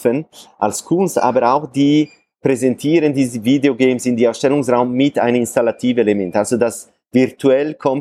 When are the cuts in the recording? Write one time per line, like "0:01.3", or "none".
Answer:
none